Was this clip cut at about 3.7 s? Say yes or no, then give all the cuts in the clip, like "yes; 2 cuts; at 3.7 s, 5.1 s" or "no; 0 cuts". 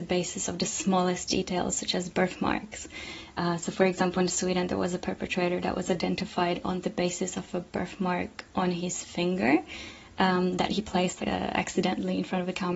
no; 1 cut; at 11.2 s